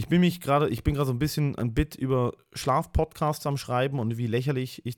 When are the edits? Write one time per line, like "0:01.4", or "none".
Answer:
none